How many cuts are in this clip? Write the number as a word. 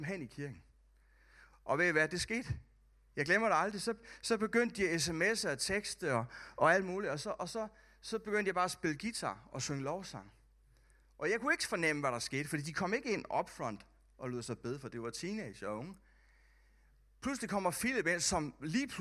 zero